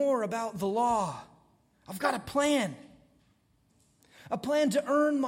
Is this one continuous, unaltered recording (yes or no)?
yes